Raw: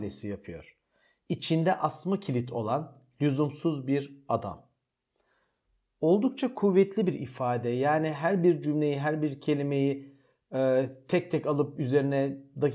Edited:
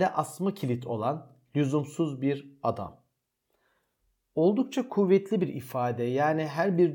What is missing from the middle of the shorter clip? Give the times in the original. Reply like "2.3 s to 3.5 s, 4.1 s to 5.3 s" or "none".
none

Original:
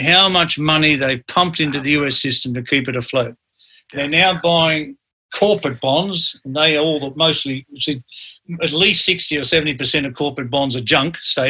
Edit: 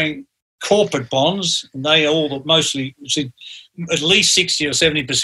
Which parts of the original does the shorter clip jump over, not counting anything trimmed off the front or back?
none

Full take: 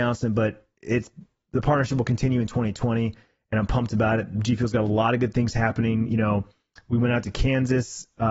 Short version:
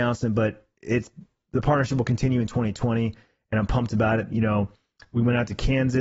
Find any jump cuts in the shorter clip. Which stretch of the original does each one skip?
4.3 s to 6.1 s

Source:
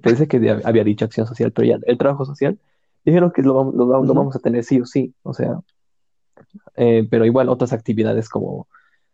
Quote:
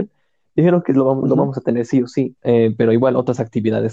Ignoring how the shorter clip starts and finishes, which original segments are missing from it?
3.7 s to 4.0 s, 5.2 s to 6.7 s

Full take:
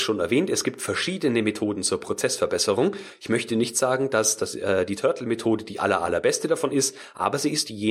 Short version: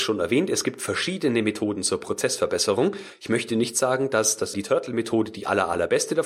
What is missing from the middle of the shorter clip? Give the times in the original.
4.5 s to 4.9 s

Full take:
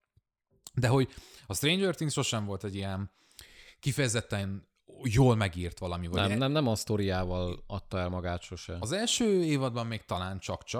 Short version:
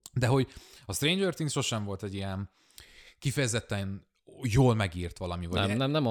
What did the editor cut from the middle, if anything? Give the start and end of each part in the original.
none

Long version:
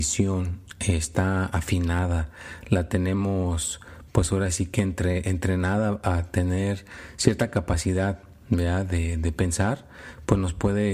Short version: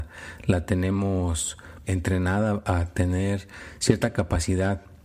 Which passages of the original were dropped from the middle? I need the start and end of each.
4.1 s to 5.2 s

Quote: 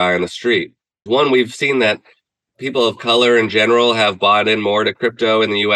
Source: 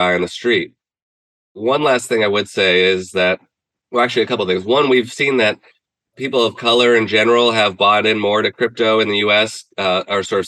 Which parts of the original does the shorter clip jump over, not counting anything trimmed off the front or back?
1.1 s to 4.6 s

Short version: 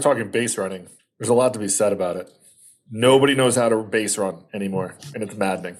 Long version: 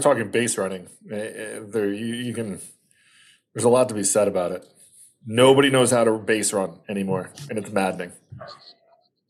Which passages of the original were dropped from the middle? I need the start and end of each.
1.0 s to 3.3 s

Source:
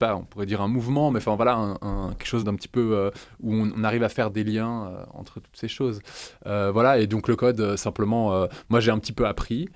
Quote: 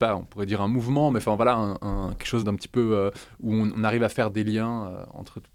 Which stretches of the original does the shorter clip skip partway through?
none

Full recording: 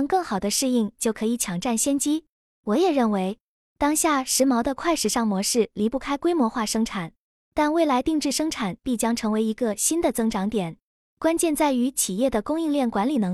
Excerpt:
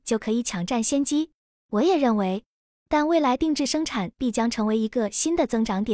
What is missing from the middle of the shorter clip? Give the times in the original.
3.6 s to 7.3 s

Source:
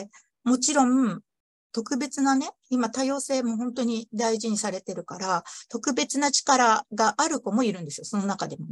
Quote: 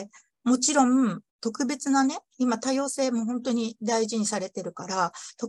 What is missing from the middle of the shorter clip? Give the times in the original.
1.3 s to 1.6 s

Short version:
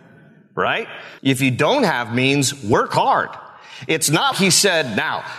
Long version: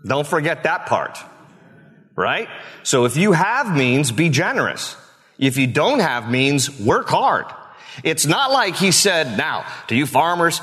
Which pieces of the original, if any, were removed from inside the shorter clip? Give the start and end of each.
2.8 s to 5.3 s, 8.5 s to 8.7 s

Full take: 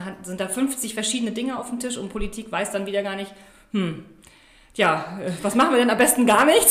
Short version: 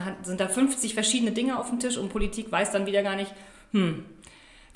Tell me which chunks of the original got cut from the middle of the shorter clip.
none

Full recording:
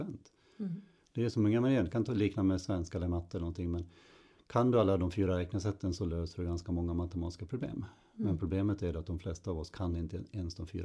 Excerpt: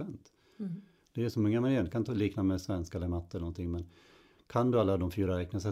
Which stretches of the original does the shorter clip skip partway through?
none

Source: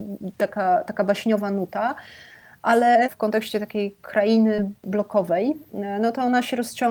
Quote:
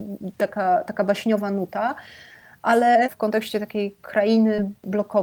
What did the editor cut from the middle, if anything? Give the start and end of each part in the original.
none

